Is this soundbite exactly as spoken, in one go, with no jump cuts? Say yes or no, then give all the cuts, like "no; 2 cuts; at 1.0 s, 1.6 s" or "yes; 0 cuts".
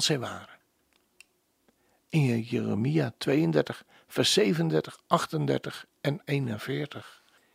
yes; 0 cuts